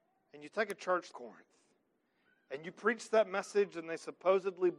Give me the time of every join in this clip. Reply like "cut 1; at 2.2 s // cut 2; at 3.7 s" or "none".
cut 1; at 1.1 s

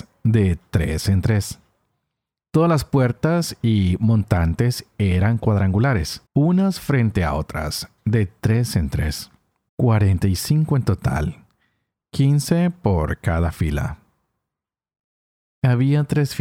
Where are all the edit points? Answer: cut 1; at 6.3 s // cut 2; at 9.7 s

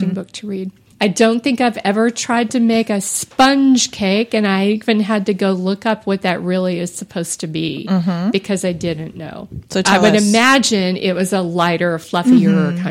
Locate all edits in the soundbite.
cut 1; at 0.9 s

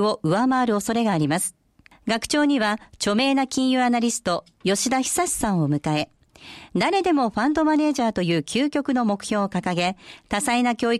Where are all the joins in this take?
cut 1; at 1.9 s

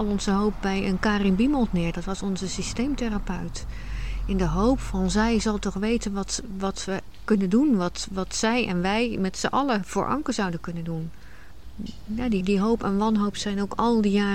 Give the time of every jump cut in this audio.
cut 1; at 12.4 s

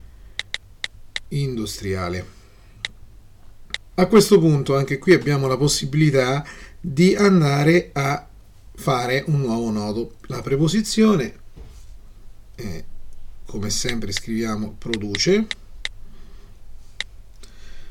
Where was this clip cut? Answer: cut 1; at 4.0 s

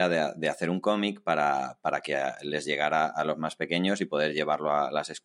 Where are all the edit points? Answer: none

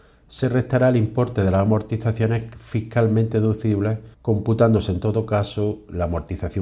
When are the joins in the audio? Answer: cut 1; at 4.1 s

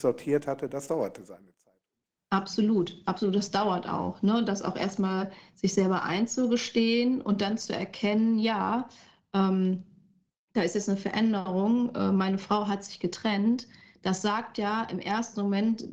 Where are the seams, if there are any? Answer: none

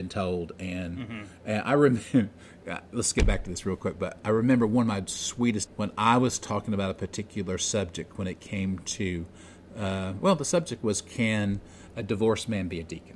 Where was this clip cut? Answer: cut 1; at 5.7 s

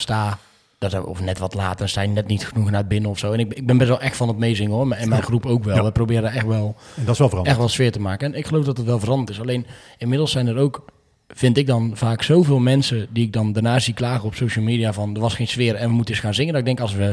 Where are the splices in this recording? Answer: none

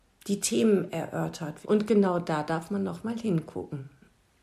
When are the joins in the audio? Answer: cut 1; at 1.6 s

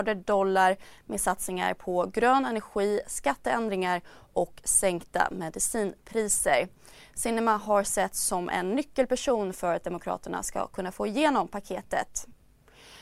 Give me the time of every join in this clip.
none

